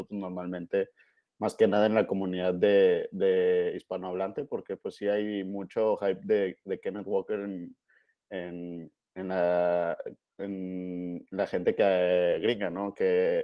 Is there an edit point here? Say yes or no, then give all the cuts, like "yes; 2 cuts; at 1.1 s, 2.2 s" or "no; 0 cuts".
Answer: no; 0 cuts